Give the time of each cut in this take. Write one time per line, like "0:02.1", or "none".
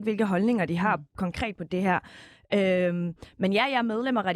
none